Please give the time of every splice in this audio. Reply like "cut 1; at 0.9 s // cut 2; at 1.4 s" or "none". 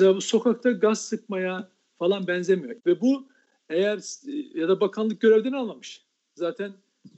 cut 1; at 2.8 s // cut 2; at 4.5 s